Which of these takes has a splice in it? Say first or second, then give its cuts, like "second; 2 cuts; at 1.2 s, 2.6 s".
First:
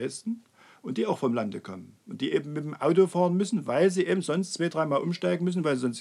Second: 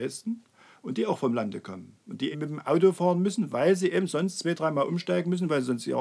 second; 1 cut; at 2.3 s